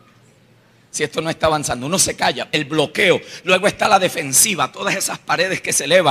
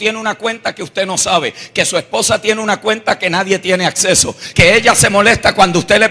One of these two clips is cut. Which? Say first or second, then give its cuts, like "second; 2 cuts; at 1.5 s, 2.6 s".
second; 1 cut; at 4.5 s